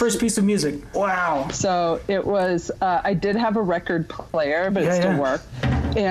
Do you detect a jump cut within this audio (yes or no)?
yes